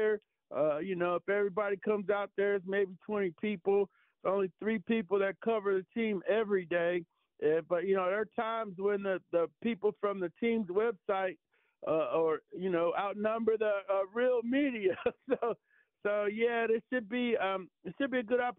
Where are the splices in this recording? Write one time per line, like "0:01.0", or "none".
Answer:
none

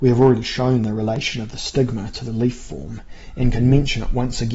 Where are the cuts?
none

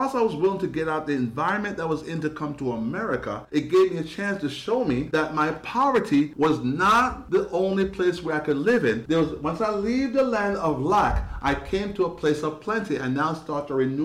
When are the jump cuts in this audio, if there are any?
none

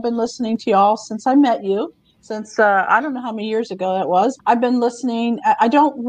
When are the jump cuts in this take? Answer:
0:04.4

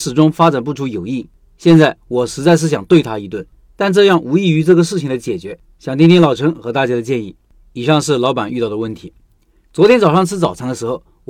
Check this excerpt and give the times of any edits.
none

